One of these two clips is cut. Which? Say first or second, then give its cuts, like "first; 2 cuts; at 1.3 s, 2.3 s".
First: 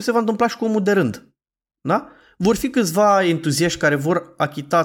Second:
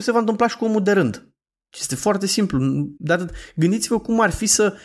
second; 2 cuts; at 1.7 s, 3.0 s